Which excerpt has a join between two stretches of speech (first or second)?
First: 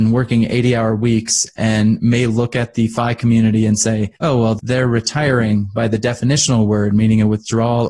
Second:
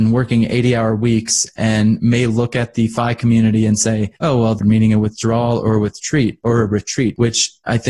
second